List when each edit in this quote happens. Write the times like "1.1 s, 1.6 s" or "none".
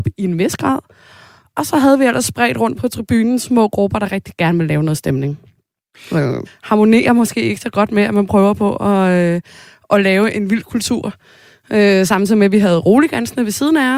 6.5 s

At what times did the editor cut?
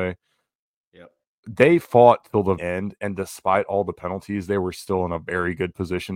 2.6 s

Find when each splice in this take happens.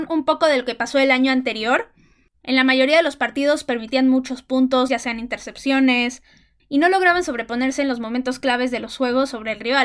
2.3 s, 4.9 s, 6.6 s

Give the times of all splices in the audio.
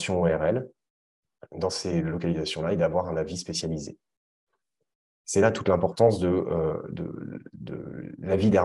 none

